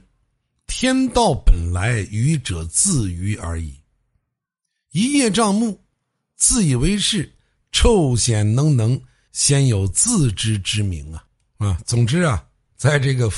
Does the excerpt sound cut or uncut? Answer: uncut